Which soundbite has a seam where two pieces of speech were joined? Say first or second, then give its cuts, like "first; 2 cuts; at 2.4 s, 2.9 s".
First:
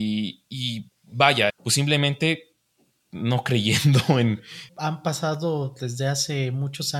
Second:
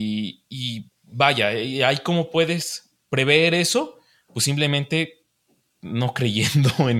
first; 2 cuts; at 1.5 s, 4.7 s